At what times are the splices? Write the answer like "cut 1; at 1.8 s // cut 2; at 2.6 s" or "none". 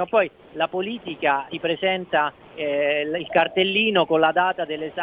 cut 1; at 1.5 s